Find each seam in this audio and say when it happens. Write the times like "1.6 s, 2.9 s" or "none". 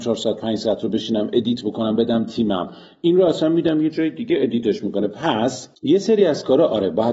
5.7 s